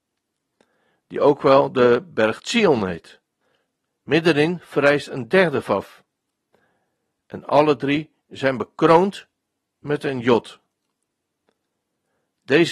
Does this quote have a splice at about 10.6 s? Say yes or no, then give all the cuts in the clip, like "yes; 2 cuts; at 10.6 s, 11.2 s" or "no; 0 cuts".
no; 1 cut; at 3.9 s